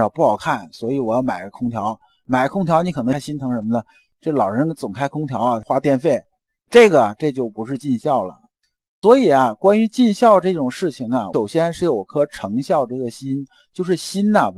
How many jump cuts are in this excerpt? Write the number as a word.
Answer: zero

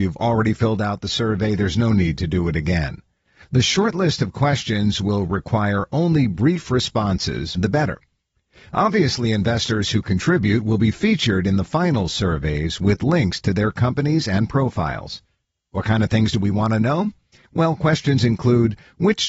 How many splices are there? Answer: one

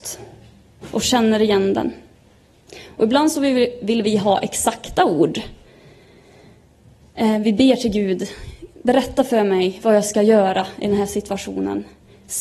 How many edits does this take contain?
zero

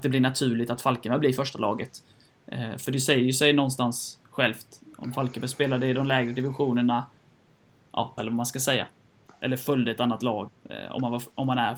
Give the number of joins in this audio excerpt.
two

